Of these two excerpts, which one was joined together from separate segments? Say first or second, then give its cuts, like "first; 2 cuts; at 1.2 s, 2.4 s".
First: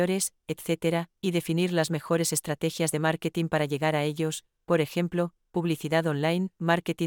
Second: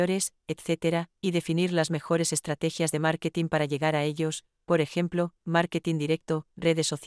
second; 1 cut; at 5.4 s